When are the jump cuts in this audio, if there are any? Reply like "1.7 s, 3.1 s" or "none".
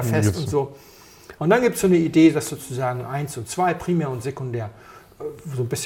1.4 s